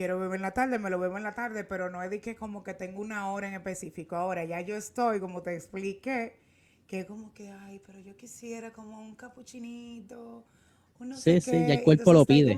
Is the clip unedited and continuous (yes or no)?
yes